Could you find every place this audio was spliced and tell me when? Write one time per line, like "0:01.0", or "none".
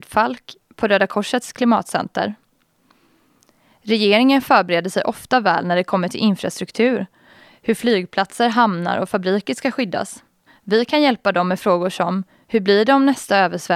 0:10.5

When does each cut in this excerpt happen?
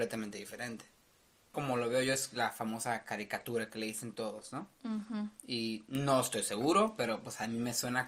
0:01.5

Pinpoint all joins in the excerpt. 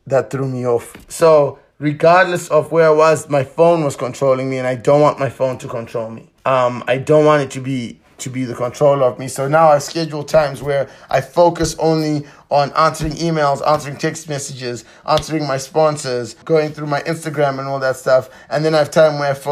0:06.4
0:16.4

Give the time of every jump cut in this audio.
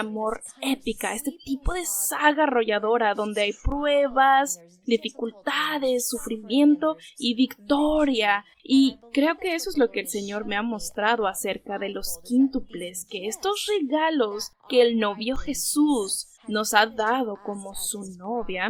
0:08.5
0:16.4

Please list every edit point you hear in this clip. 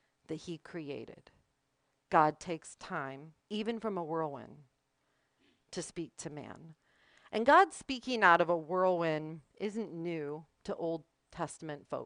0:03.4

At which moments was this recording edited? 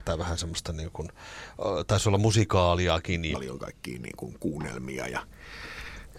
0:03.3

